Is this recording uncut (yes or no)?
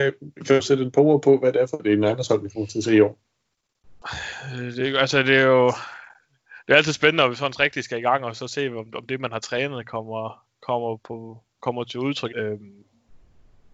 no